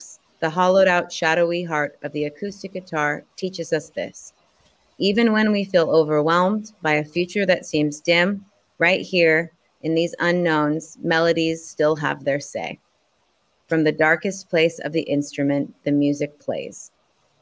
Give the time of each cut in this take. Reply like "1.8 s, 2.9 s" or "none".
none